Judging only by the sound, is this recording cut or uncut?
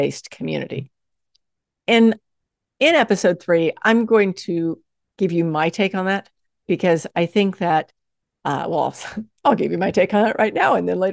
uncut